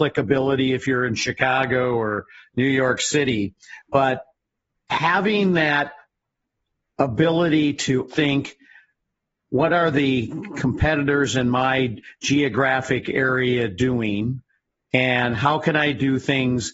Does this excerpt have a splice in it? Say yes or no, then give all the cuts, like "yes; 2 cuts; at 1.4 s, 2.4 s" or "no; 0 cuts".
yes; 1 cut; at 8.1 s